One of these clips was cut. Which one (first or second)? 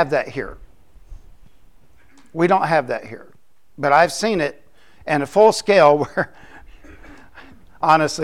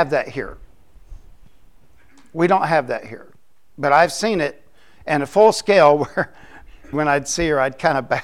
second